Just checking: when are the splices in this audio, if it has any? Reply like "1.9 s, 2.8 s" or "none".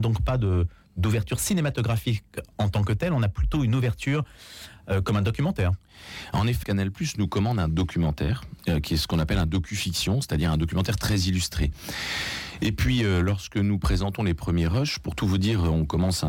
6.6 s